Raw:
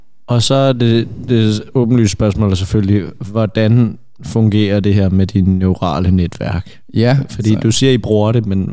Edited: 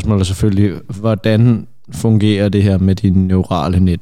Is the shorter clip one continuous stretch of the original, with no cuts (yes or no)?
yes